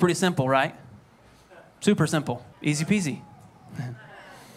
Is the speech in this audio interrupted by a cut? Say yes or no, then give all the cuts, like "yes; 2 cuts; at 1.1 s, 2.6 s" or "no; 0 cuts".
yes; 1 cut; at 2.5 s